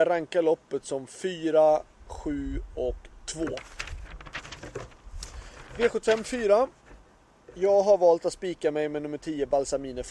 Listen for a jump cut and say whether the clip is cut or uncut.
uncut